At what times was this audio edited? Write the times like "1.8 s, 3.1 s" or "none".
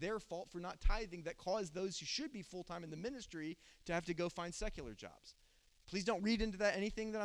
none